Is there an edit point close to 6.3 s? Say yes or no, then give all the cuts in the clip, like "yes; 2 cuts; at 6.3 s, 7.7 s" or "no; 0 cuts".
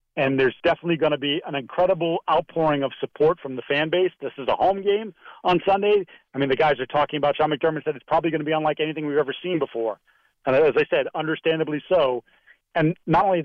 no; 1 cut; at 10.3 s